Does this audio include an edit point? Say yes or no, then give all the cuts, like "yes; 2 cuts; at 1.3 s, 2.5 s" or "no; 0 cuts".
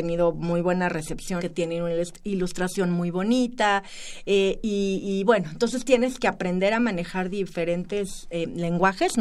yes; 1 cut; at 1.4 s